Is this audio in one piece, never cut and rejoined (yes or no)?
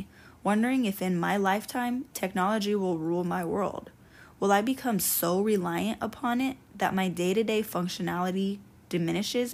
yes